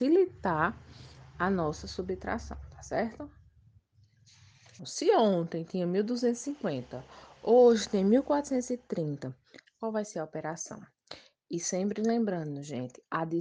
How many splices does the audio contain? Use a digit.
2